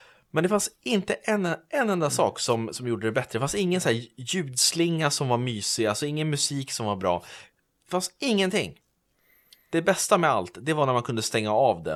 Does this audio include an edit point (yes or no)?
no